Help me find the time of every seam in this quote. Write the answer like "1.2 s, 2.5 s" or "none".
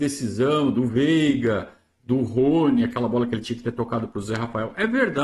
none